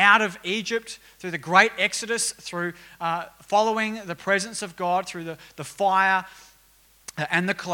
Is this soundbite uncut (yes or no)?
yes